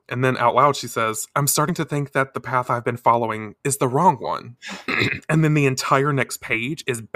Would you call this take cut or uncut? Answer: cut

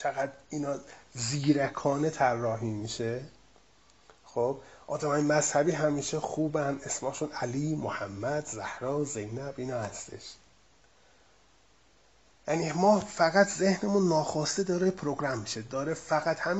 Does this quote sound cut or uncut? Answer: uncut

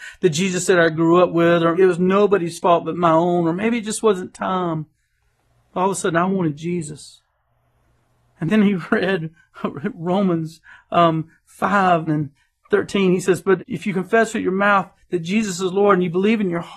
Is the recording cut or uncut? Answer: cut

